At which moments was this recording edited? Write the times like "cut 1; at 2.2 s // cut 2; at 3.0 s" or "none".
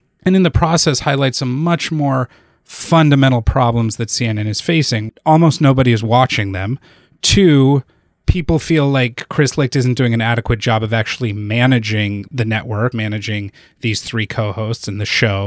cut 1; at 5.1 s // cut 2; at 12.9 s